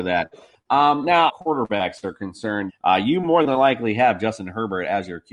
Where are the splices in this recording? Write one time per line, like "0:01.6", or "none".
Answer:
0:01.3
0:02.7